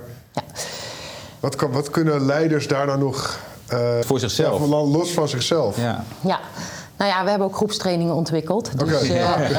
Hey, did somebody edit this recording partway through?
yes; 1 cut; at 4.0 s

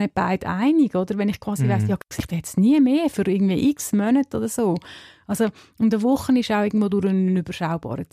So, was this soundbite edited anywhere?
no; 0 cuts

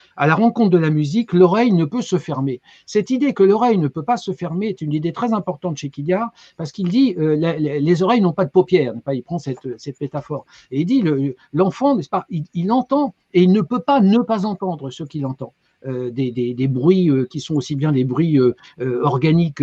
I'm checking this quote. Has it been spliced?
no; 0 cuts

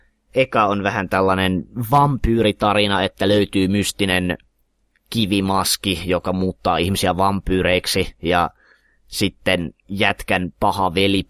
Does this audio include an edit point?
no; 0 cuts

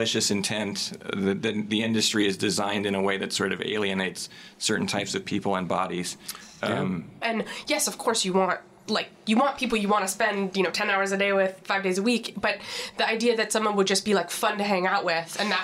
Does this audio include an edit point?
yes; 1 cut; at 7.2 s

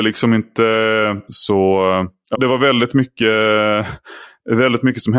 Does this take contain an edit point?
yes; 2 cuts; at 1.3 s, 2.3 s

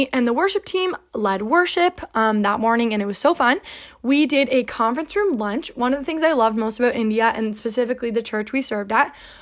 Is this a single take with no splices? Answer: yes; 0 cuts

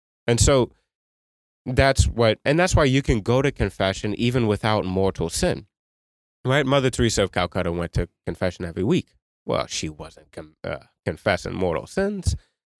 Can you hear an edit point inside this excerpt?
no; 0 cuts

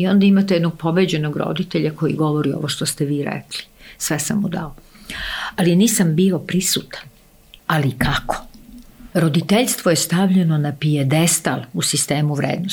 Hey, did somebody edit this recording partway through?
yes; 2 cuts; at 7.6 s, 9.1 s

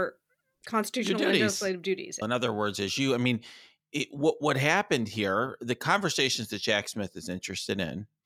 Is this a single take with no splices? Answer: no; 1 cut; at 2.2 s

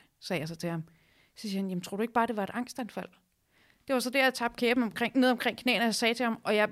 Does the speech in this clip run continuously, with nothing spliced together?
yes; 0 cuts

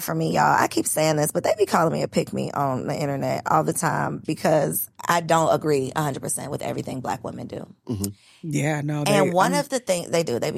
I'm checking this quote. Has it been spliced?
no; 0 cuts

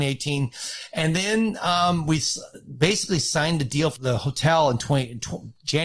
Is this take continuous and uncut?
no; 1 cut; at 4.0 s

